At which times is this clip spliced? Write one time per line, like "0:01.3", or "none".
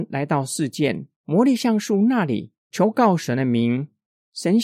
0:02.7